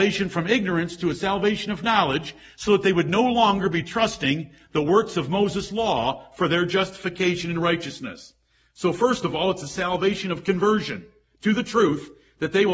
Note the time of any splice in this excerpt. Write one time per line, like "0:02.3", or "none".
none